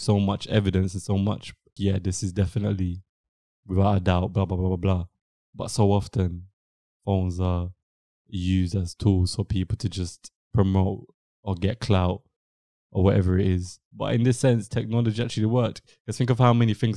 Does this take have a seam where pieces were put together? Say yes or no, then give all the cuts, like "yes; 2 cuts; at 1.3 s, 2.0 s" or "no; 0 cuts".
yes; 1 cut; at 1.8 s